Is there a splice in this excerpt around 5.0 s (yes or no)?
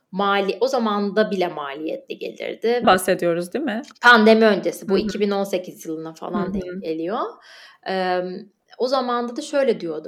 no